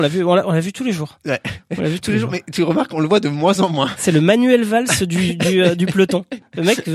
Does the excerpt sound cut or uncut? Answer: uncut